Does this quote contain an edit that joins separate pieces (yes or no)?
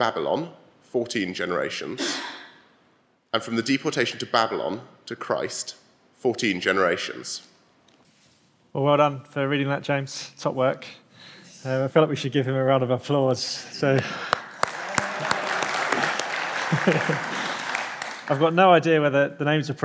no